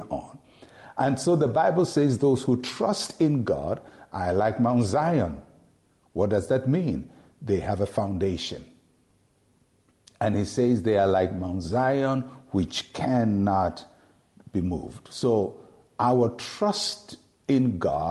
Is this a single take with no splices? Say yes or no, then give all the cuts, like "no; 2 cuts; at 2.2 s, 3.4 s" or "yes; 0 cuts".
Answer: yes; 0 cuts